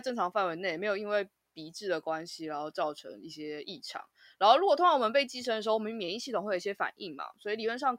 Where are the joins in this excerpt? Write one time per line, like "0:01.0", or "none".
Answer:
none